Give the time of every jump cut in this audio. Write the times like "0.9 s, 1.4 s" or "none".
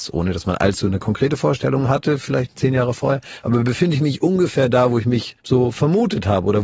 5.4 s